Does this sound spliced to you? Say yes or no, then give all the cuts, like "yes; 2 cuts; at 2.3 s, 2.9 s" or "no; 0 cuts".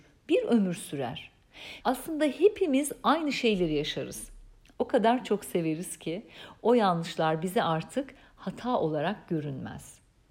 yes; 2 cuts; at 1.8 s, 4.7 s